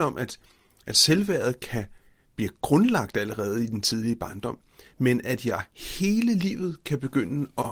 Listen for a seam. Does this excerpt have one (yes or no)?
no